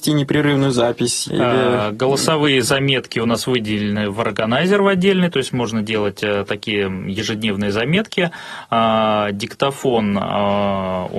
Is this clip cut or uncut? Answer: cut